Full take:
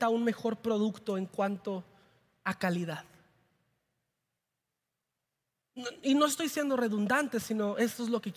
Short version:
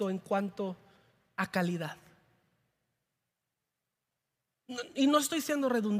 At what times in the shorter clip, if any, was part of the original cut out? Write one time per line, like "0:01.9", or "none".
none